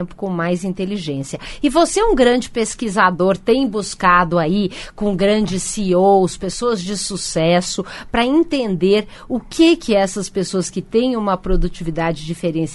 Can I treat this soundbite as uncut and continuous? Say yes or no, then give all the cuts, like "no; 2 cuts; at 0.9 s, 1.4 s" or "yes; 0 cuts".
yes; 0 cuts